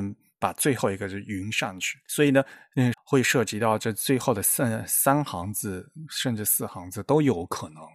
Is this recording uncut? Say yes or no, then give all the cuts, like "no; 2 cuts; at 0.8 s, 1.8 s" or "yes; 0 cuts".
no; 1 cut; at 2.9 s